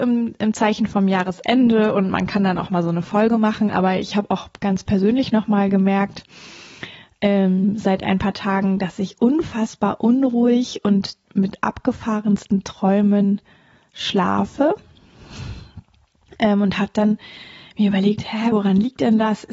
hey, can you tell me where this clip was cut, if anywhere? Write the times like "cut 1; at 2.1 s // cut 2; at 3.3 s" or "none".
cut 1; at 11.2 s // cut 2; at 18.5 s